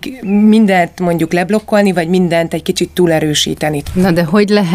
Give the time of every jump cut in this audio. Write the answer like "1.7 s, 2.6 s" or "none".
3.8 s

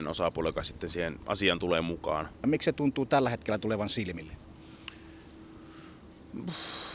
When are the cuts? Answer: 2.4 s

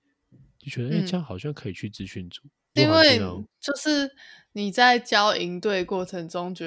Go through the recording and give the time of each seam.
2.8 s

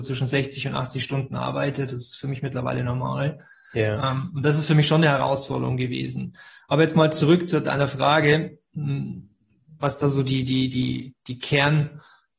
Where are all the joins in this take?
none

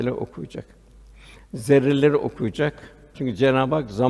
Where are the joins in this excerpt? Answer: 3.1 s

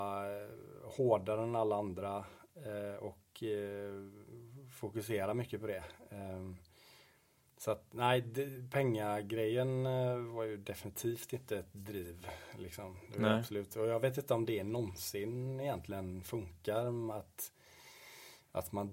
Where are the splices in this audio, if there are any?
none

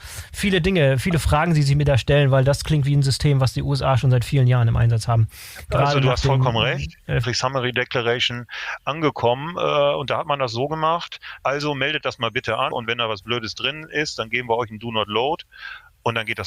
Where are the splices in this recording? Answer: 7.2 s, 11.4 s, 12.7 s

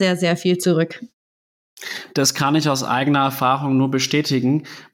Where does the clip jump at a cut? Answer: none

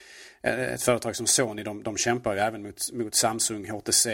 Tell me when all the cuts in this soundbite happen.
none

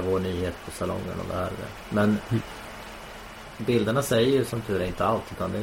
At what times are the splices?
none

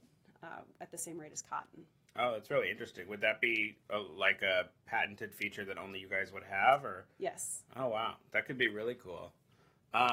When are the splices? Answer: none

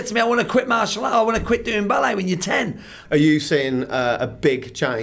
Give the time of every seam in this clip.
3.0 s

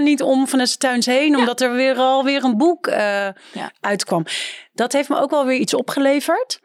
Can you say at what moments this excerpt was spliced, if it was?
none

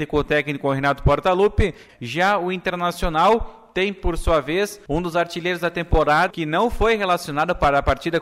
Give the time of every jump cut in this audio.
1.9 s, 6.3 s

